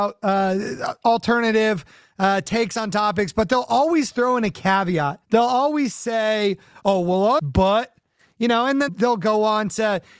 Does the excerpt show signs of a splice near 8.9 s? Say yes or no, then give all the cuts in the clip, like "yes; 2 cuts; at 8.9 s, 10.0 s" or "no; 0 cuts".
yes; 3 cuts; at 5.2 s, 7.4 s, 8.9 s